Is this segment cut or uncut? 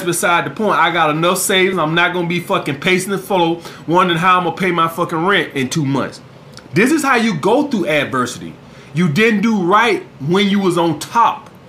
uncut